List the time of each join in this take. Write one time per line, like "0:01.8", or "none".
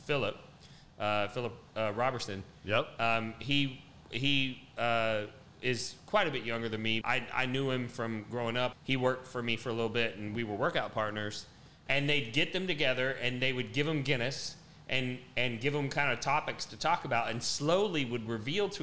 0:07.0
0:08.7
0:11.9

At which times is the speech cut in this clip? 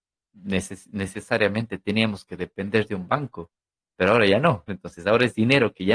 0:04.7

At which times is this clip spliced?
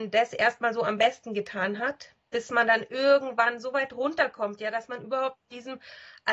none

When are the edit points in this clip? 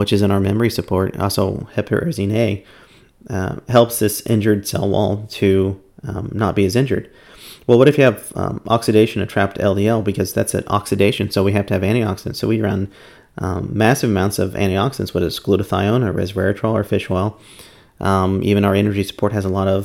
none

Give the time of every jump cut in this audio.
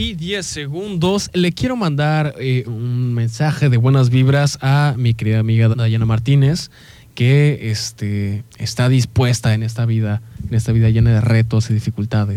0:02.6
0:05.7

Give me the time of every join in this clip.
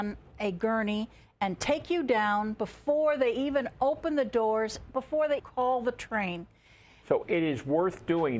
0:05.4
0:07.0

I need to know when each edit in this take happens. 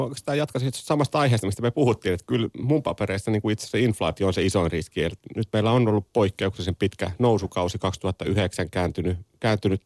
none

